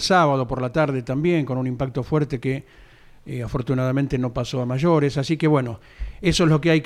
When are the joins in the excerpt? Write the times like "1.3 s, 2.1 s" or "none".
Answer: none